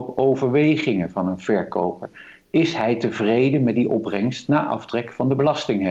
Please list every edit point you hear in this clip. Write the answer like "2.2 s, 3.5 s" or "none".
none